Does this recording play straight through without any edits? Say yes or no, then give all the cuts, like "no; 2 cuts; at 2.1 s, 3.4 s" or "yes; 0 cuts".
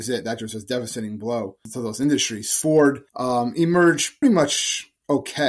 no; 2 cuts; at 3.1 s, 4.2 s